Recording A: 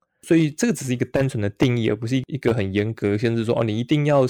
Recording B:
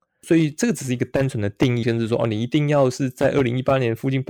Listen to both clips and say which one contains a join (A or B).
B